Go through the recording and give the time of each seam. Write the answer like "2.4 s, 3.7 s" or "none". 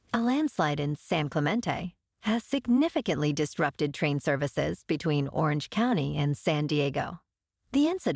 none